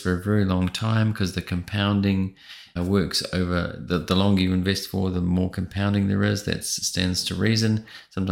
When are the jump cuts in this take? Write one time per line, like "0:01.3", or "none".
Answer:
0:02.8